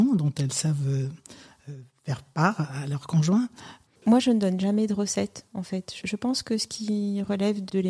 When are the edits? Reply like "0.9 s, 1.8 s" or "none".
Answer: 3.9 s